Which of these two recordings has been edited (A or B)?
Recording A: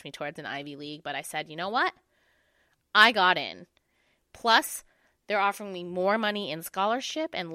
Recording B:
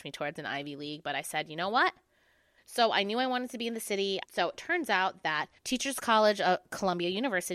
B